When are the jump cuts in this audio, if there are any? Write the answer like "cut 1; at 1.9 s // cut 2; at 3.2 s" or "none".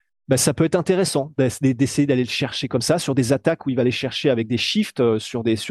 none